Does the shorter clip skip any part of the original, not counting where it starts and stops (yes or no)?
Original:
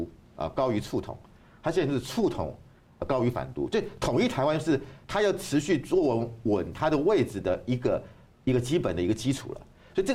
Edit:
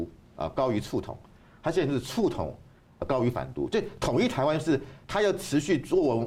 no